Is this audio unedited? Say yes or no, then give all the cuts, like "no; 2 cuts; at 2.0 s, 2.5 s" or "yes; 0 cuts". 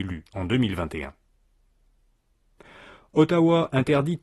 yes; 0 cuts